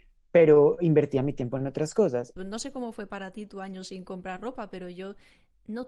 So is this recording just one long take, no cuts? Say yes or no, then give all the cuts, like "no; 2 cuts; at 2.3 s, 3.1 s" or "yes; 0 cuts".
no; 1 cut; at 2.4 s